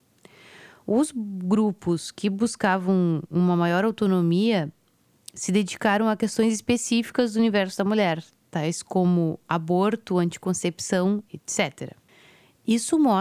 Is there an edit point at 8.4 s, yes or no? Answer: no